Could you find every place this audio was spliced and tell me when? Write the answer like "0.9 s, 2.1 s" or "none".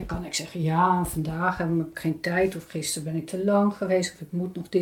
none

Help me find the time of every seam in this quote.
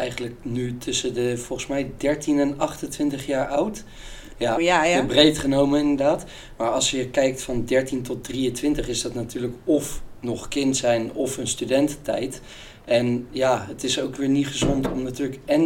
4.6 s

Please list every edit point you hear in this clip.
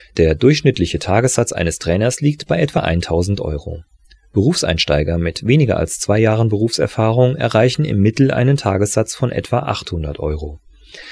none

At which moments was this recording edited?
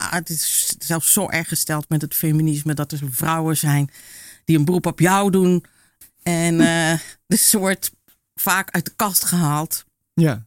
6.0 s

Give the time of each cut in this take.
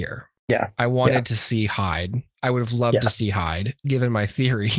3.8 s

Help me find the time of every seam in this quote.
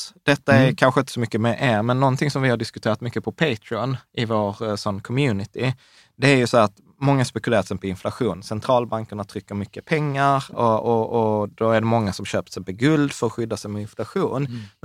none

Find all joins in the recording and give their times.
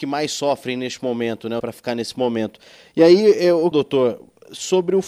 1.6 s, 3.7 s

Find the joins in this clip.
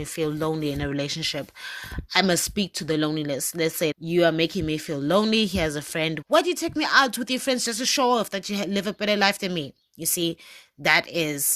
3.9 s, 6.2 s

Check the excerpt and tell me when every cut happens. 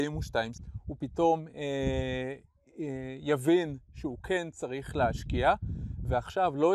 none

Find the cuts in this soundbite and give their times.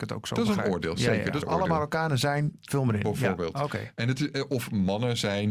1.4 s

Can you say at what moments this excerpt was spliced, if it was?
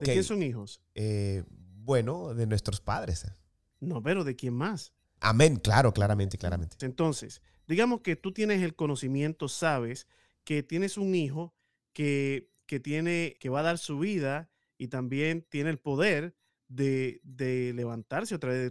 5.2 s, 6.8 s, 13.4 s

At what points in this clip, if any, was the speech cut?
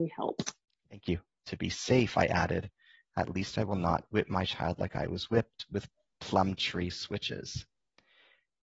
1.4 s

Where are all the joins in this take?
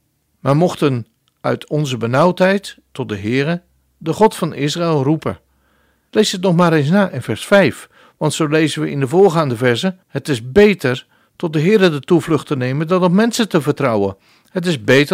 6.1 s, 10.0 s

